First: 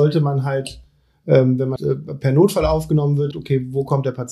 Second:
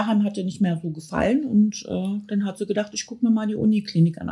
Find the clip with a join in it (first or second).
first